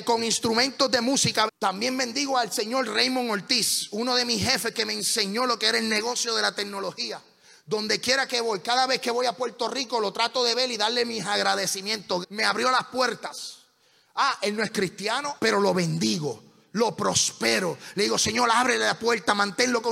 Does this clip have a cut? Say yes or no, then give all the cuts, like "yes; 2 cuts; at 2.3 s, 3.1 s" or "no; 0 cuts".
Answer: yes; 3 cuts; at 1.5 s, 12.2 s, 15.4 s